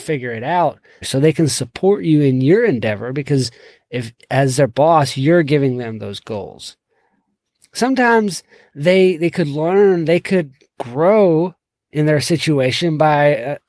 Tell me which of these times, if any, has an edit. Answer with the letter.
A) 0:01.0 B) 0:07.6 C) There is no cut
A